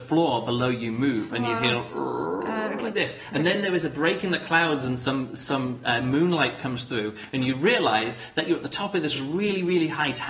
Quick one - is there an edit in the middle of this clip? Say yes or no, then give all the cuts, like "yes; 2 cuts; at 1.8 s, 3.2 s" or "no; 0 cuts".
no; 0 cuts